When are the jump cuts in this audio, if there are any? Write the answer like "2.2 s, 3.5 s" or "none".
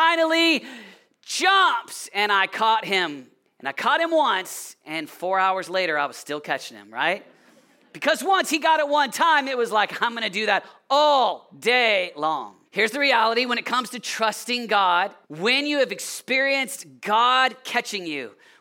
12.7 s, 15.2 s

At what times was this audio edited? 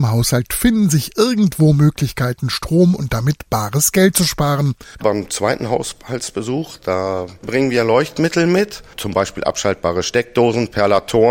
5.0 s

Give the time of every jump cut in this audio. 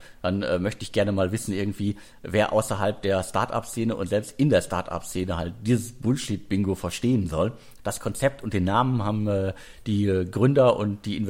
7.8 s

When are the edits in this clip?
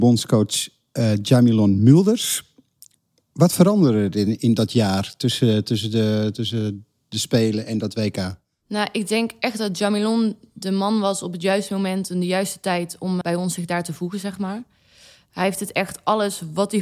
13.2 s

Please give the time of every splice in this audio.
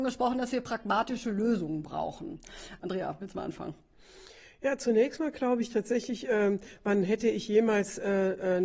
2.8 s

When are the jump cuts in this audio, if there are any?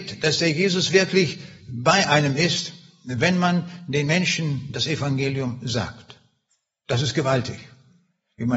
none

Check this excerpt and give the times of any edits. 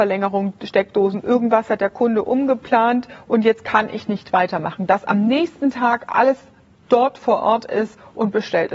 none

